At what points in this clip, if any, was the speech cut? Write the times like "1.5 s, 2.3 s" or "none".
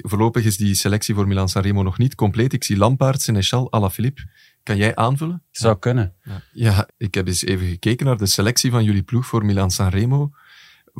5.5 s, 6.9 s